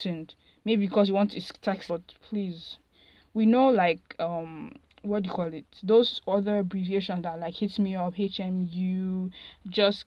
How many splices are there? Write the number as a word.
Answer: one